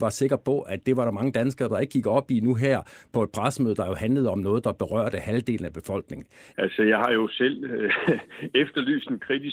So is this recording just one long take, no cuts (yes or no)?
no